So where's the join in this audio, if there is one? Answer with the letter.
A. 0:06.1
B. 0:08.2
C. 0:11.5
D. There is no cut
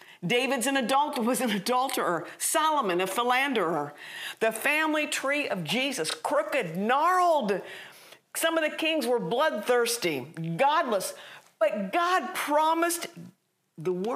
D